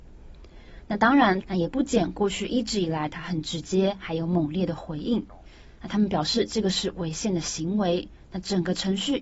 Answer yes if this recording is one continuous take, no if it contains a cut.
no